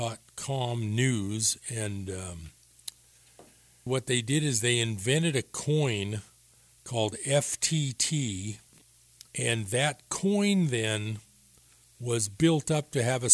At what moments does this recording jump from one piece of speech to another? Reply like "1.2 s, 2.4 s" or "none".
3.9 s, 9.3 s